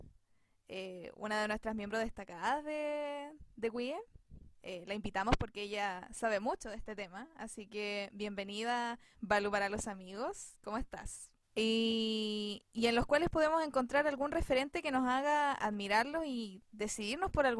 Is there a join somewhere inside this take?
yes; 2 cuts; at 9.2 s, 11.4 s

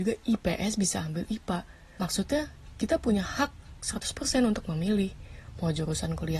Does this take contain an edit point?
yes; 1 cut; at 2.0 s

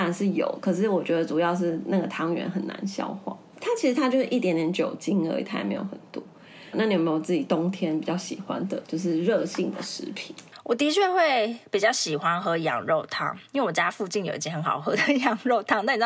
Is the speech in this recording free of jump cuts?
no; 2 cuts; at 3.5 s, 6.7 s

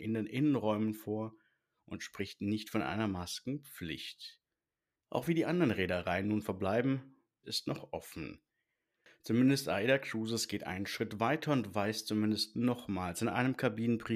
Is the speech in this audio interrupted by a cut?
yes; 2 cuts; at 5.0 s, 7.4 s

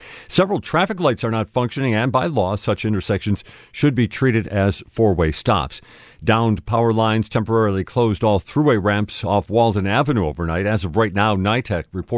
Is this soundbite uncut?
yes; 0 cuts

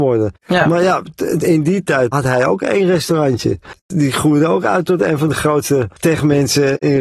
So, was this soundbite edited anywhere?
yes; 2 cuts; at 2.1 s, 3.8 s

